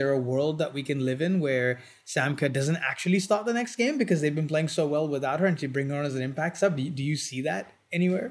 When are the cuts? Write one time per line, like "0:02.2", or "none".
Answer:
none